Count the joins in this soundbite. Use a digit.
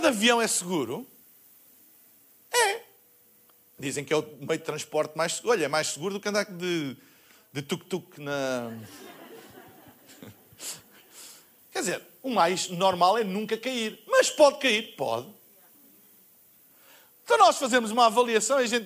1